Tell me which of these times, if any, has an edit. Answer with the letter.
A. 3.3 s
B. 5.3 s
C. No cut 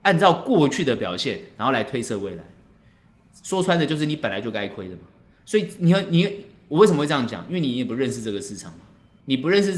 A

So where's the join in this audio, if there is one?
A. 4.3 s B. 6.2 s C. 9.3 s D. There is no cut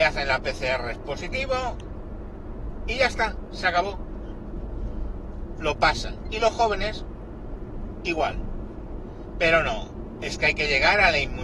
D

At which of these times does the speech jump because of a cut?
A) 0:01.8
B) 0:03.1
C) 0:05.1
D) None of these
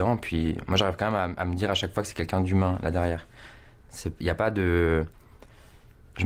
D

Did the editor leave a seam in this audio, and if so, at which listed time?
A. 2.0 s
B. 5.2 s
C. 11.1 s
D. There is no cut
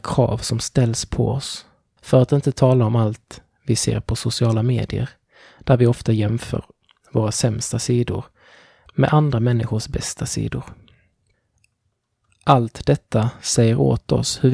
A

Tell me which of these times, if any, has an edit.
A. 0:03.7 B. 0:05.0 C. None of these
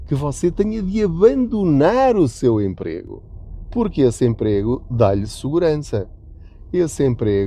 C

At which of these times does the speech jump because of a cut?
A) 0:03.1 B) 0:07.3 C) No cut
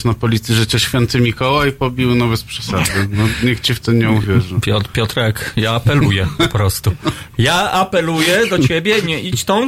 C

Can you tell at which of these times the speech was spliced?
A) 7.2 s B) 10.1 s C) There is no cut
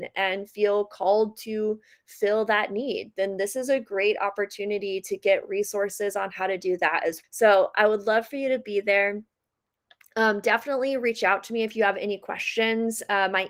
A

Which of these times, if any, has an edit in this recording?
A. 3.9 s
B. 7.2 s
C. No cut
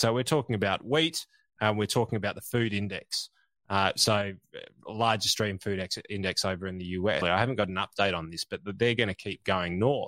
B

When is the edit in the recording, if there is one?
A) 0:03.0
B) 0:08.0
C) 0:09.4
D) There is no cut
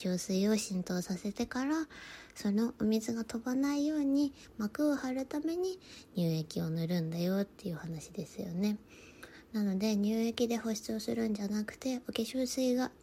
D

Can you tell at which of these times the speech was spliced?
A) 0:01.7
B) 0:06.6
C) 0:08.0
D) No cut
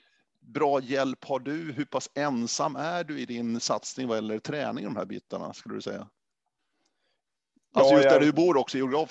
D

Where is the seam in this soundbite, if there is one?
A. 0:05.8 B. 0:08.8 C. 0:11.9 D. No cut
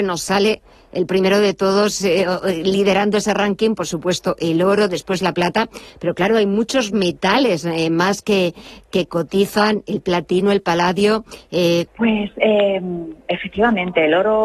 C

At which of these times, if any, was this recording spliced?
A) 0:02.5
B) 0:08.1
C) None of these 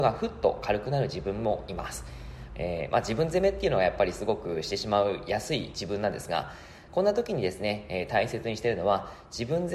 A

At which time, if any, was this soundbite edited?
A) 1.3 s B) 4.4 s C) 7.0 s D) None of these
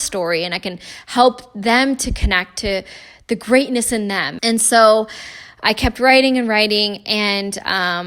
B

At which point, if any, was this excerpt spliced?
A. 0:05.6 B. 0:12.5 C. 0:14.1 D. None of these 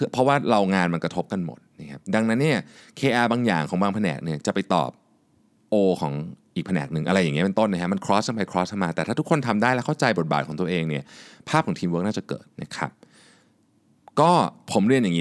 B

